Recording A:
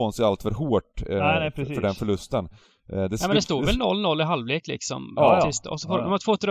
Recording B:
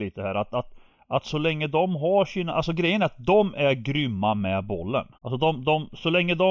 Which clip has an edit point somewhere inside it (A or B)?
B